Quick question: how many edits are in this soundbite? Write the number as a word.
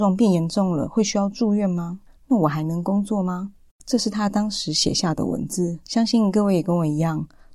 two